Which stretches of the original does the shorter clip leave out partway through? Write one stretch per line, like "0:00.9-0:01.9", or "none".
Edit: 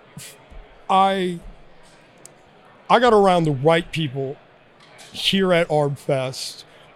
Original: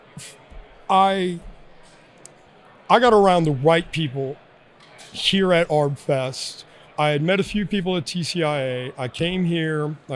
none